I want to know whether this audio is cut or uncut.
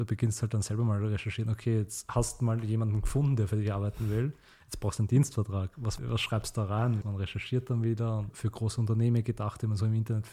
cut